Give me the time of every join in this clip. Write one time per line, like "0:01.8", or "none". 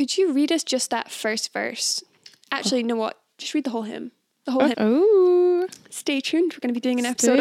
0:04.7